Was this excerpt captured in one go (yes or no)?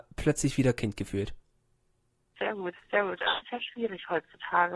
no